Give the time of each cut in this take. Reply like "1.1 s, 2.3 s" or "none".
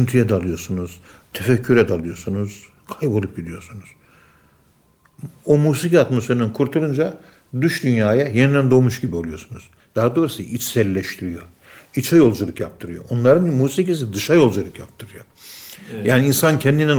9.8 s